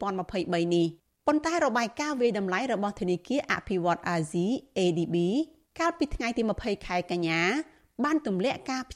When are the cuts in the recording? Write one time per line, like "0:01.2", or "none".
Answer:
none